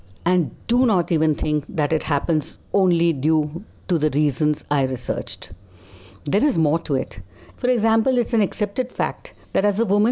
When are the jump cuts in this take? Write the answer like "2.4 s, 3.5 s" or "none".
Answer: 7.5 s

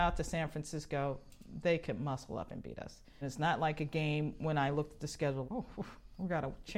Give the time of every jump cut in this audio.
3.2 s, 5.4 s

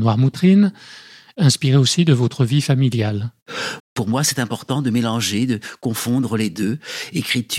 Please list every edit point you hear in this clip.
3.8 s

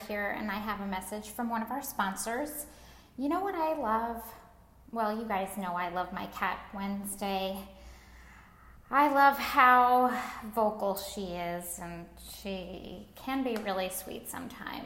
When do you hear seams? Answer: none

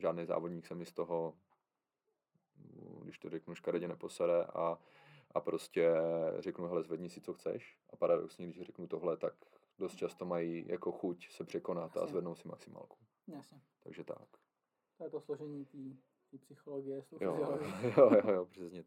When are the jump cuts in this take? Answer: none

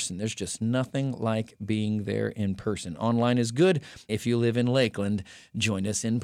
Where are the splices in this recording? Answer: 4.1 s

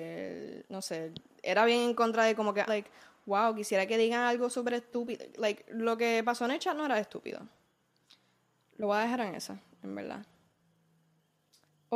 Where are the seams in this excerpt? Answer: 2.7 s

